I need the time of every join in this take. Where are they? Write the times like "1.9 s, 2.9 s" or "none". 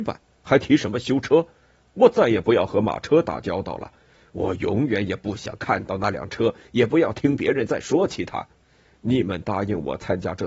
none